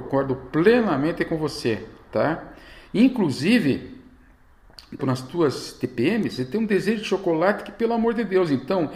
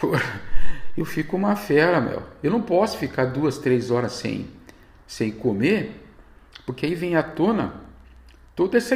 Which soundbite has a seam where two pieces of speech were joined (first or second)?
first